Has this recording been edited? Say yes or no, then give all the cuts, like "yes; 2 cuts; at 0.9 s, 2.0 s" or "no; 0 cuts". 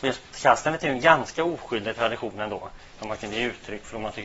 yes; 1 cut; at 2.9 s